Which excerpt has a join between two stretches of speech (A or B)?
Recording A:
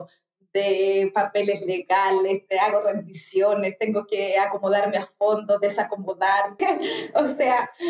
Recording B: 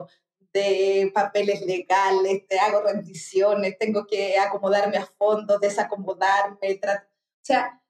A